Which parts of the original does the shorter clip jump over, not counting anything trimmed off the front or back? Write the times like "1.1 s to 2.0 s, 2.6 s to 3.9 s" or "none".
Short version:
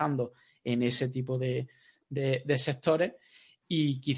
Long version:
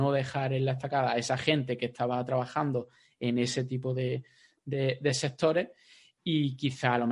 none